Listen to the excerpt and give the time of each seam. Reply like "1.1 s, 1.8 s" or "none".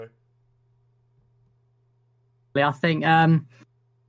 2.6 s